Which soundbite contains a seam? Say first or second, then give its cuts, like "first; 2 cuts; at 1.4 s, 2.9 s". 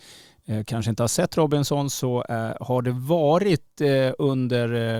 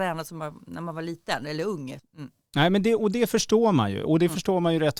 second; 1 cut; at 2.0 s